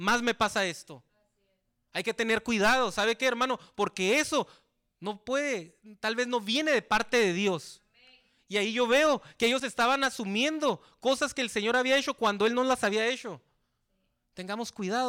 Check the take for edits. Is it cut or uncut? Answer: uncut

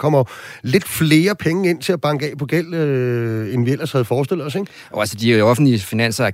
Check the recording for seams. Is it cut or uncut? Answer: uncut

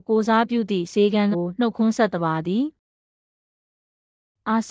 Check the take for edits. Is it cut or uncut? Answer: cut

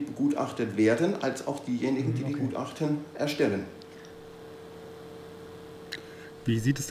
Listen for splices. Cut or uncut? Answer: uncut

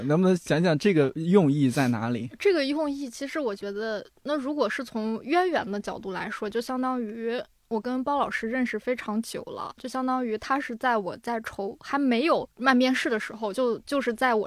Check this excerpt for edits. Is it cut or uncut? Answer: uncut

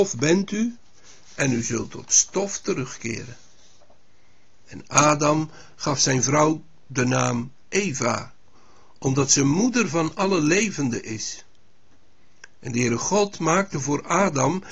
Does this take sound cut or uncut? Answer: uncut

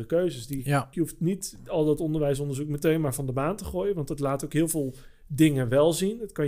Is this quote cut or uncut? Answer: cut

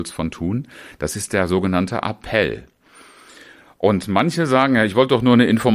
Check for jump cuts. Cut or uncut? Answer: uncut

